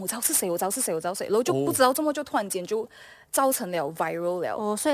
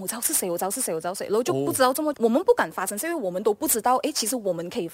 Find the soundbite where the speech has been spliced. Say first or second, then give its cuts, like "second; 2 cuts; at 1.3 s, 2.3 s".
second; 1 cut; at 2.1 s